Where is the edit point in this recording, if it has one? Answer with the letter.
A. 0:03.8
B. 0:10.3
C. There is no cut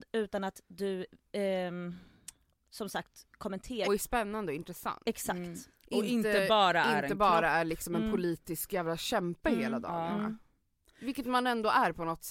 A